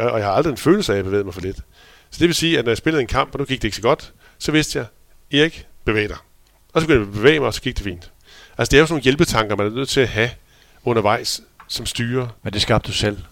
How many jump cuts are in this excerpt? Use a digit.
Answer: 0